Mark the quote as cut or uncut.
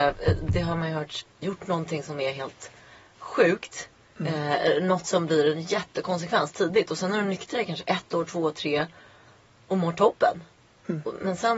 cut